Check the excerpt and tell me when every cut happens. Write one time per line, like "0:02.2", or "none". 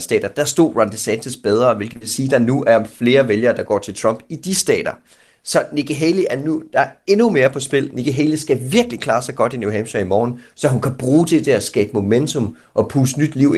none